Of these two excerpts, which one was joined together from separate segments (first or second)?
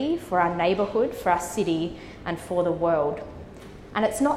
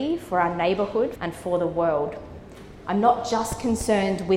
second